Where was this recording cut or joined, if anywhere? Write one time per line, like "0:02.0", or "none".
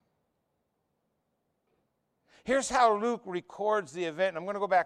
none